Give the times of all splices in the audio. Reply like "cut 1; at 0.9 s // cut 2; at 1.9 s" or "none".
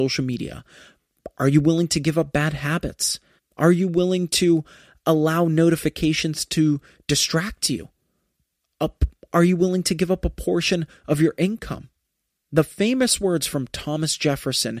cut 1; at 3.4 s